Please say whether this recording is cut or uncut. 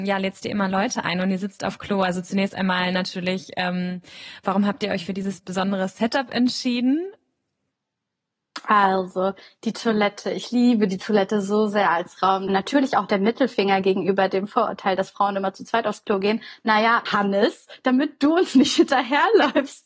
cut